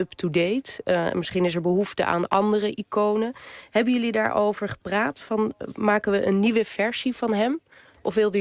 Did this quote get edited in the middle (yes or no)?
no